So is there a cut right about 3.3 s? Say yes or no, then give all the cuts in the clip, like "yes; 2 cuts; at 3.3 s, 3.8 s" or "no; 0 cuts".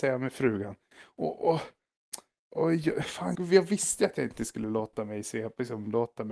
yes; 1 cut; at 3.3 s